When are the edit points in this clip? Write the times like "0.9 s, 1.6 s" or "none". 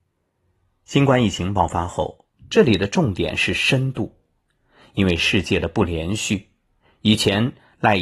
2.4 s